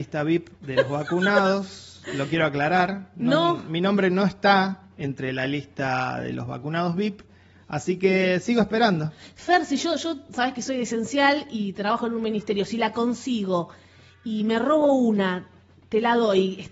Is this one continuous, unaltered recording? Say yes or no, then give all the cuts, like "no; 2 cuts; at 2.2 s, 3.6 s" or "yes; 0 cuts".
yes; 0 cuts